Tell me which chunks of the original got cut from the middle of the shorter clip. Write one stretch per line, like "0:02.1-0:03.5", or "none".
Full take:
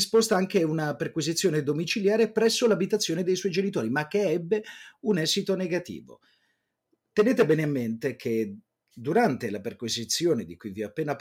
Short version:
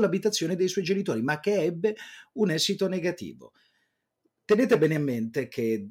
none